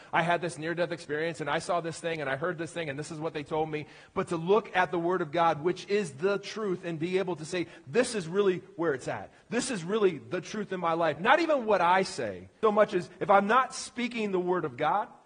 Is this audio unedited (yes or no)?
no